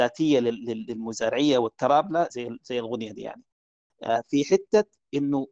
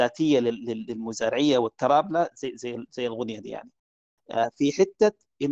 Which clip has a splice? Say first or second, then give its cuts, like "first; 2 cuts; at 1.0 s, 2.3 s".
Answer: first; 1 cut; at 2.3 s